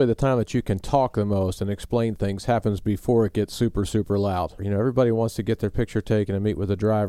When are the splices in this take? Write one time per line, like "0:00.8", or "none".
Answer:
0:04.6